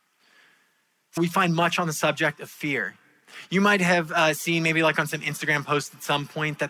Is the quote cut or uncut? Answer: cut